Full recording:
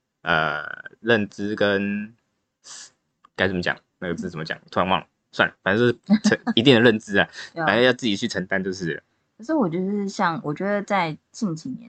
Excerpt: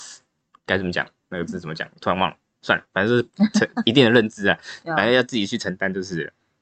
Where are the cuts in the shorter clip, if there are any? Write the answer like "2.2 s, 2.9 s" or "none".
none